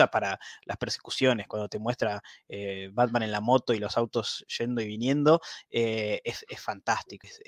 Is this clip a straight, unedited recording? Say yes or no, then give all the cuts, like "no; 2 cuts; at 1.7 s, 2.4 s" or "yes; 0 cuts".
yes; 0 cuts